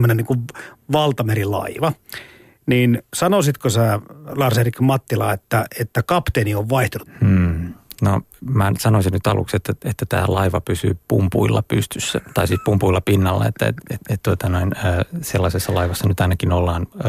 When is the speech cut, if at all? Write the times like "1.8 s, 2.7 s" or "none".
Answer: 7.1 s, 13.8 s